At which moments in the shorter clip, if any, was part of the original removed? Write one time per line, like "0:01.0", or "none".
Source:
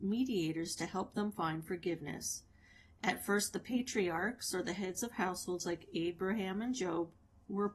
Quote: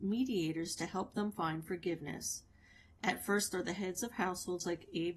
0:03.5